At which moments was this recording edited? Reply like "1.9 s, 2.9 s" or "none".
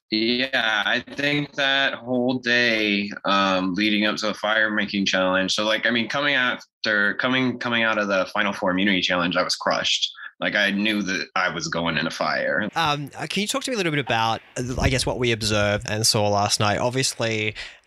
12.7 s, 15.9 s

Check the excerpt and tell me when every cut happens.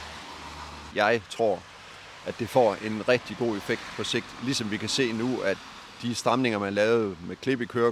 0.9 s

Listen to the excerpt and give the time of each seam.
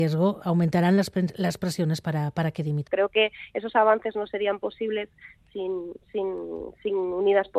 2.9 s

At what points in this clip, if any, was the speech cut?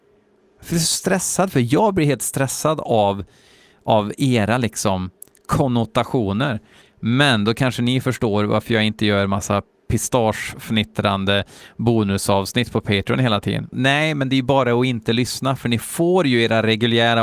6.8 s, 13.7 s

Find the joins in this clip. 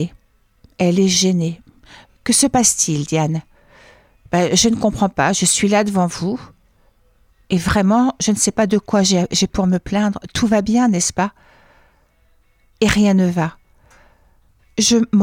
none

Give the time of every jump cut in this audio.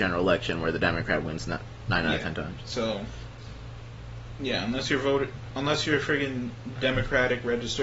none

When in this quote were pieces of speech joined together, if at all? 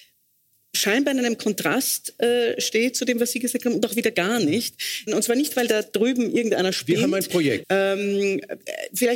5.1 s, 7.6 s

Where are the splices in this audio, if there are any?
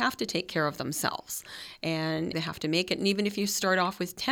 2.3 s

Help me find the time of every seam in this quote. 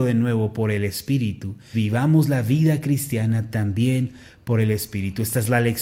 1.7 s

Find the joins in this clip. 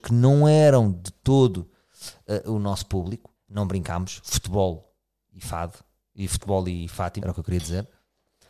3.4 s, 7.2 s

